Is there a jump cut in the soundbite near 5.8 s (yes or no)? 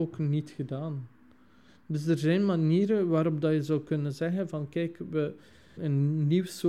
yes